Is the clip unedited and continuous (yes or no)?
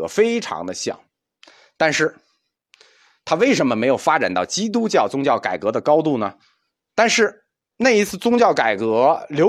no